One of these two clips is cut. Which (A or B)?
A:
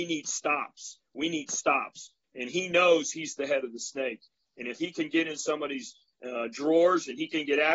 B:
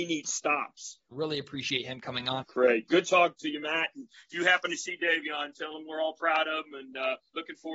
B